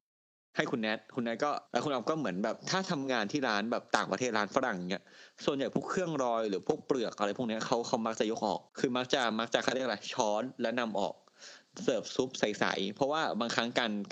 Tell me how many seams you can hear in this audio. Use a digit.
2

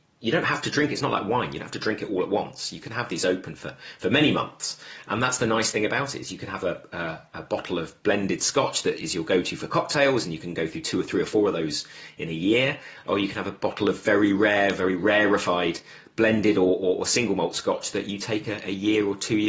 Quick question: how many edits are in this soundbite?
0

